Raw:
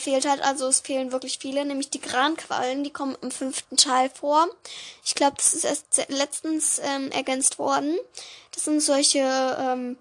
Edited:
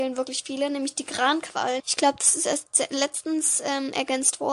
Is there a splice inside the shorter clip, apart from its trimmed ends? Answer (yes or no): yes